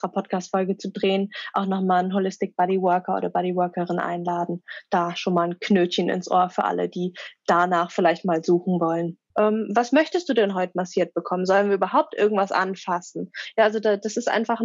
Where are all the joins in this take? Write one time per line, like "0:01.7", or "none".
0:09.3